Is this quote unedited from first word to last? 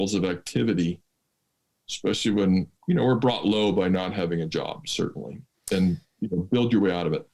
no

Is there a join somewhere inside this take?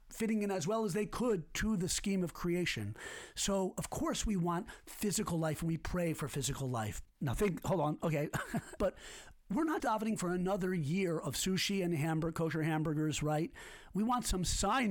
yes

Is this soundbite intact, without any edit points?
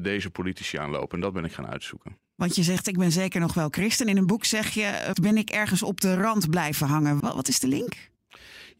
no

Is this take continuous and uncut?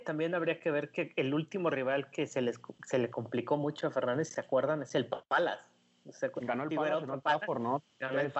yes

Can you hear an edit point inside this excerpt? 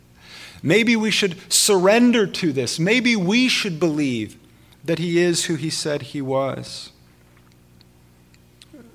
no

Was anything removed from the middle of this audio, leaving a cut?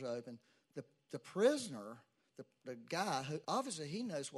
yes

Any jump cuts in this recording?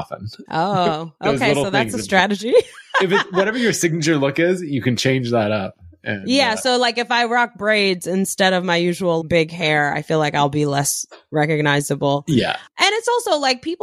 yes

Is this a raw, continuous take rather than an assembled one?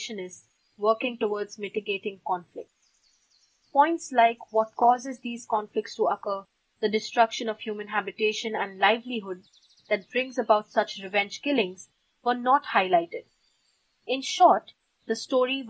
yes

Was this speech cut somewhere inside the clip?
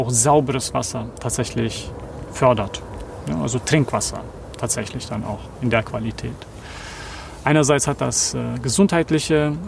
no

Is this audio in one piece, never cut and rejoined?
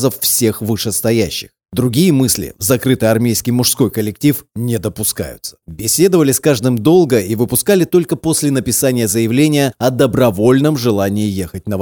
no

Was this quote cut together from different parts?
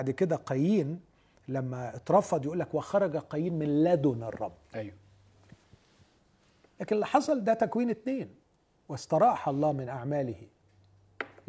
no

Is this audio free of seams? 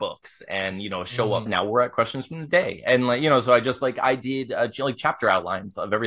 no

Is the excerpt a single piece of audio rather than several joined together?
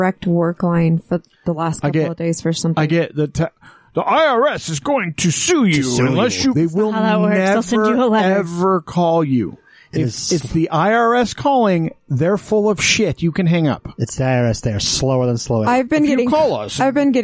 no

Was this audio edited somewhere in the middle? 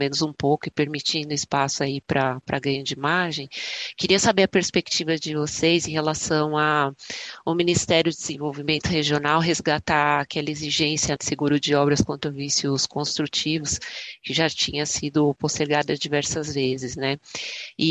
yes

